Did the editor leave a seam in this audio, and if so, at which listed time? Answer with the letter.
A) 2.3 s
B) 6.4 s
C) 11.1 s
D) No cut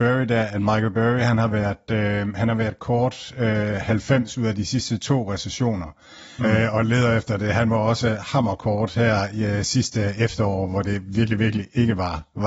B